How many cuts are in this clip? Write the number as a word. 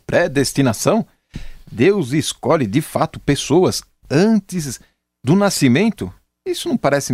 zero